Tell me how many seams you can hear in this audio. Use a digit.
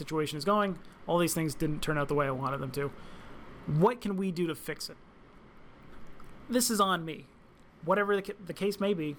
0